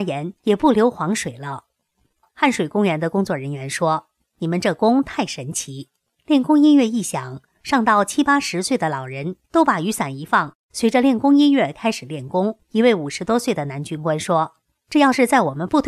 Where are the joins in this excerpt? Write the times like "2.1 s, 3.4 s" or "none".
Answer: 9.5 s, 12.6 s